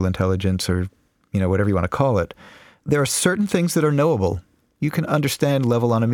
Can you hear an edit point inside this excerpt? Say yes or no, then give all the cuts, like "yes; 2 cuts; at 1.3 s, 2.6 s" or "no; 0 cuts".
no; 0 cuts